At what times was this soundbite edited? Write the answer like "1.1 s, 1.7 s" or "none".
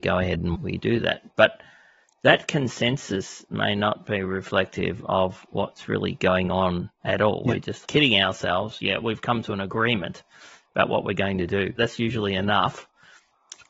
6.9 s, 11.8 s